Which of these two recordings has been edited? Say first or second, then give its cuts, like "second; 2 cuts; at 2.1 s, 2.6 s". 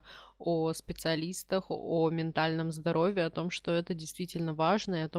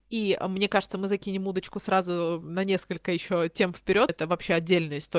second; 1 cut; at 4.1 s